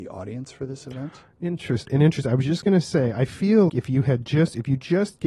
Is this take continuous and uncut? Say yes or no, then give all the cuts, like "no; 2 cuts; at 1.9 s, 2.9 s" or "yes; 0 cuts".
no; 2 cuts; at 1.9 s, 3.7 s